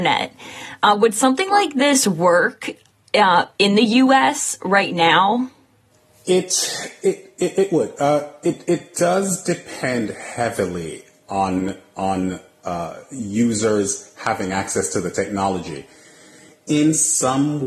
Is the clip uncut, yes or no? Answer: yes